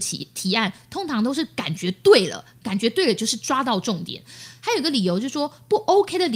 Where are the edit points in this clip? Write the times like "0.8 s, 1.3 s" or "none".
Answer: 4.6 s